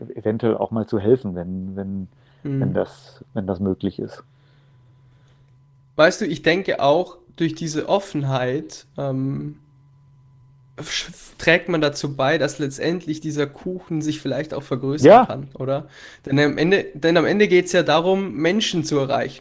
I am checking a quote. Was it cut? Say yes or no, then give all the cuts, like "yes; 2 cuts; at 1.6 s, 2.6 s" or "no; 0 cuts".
no; 0 cuts